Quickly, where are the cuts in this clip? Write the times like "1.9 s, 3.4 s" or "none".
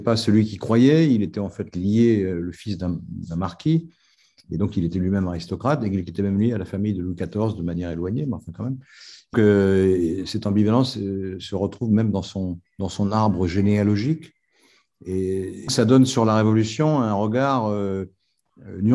9.3 s, 12.7 s, 15.7 s